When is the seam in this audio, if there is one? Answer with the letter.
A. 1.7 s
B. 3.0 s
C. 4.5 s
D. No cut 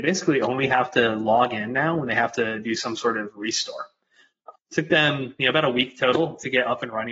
C